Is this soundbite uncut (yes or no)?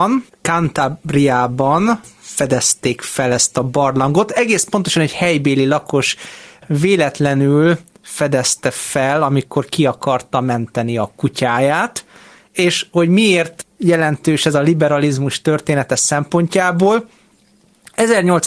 yes